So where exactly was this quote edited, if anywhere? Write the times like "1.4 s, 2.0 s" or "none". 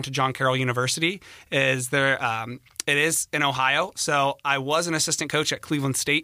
none